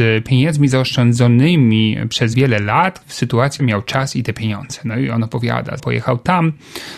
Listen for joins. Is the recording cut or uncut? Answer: cut